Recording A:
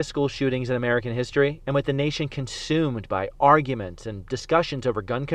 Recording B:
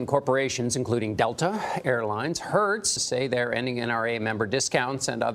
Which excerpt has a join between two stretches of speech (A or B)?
B